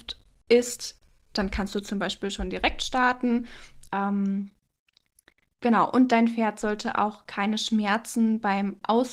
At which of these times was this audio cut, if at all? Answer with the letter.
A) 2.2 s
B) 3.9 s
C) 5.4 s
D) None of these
B